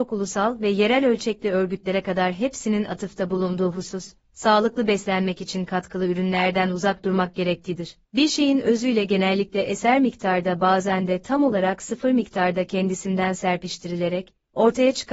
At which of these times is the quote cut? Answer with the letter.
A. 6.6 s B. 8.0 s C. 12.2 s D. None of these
B